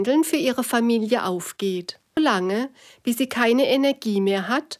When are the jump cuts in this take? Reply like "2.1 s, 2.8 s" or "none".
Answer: 2.2 s